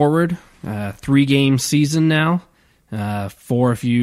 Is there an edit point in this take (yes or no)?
no